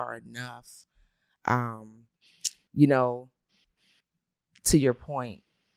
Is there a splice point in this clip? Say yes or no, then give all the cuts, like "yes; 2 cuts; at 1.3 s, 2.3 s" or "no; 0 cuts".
no; 0 cuts